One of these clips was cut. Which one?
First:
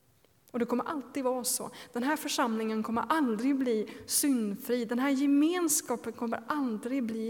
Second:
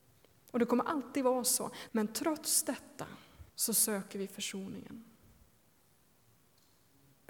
second; 2 cuts; at 1.9 s, 3.5 s

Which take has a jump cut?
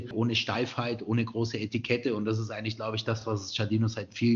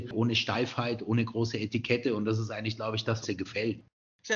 second; 1 cut; at 3.2 s

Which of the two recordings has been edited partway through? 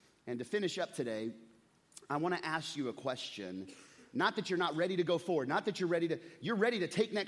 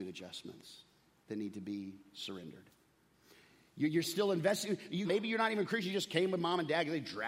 second; 1 cut; at 5.0 s

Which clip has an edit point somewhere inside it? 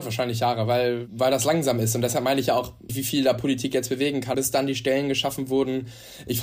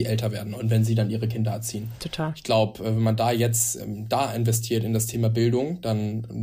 first; 2 cuts; at 2.9 s, 4.3 s

